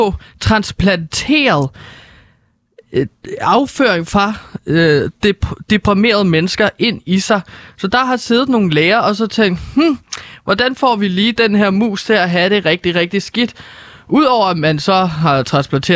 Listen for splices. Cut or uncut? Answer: uncut